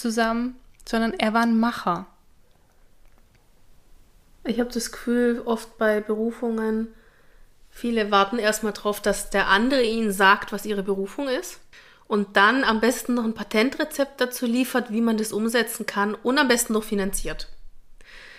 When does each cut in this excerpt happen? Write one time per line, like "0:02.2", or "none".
none